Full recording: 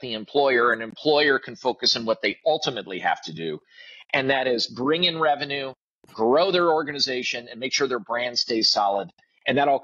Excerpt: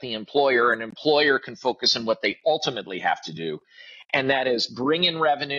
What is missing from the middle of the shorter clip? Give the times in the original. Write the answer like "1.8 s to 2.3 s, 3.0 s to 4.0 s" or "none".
none